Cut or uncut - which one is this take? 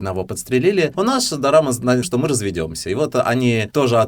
cut